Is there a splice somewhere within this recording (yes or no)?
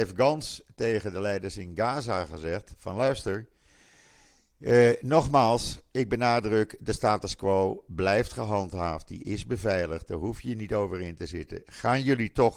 no